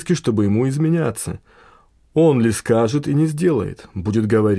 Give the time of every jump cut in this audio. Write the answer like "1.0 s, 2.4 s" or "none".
none